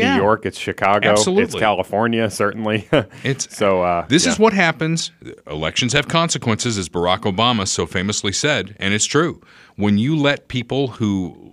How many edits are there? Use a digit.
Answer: 0